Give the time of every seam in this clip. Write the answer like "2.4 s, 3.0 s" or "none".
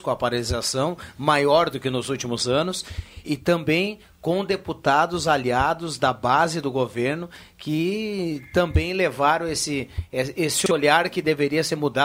3.2 s